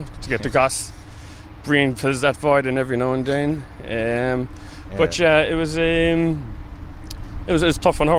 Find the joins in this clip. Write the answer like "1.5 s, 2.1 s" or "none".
none